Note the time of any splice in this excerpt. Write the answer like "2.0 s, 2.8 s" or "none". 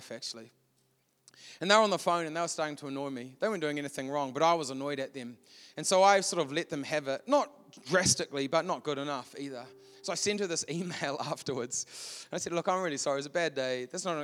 none